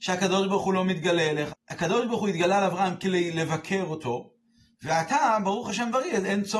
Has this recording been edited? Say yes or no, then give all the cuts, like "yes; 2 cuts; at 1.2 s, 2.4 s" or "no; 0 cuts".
yes; 1 cut; at 1.5 s